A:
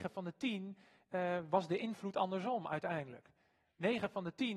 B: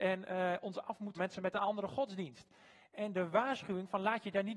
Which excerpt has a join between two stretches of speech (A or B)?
B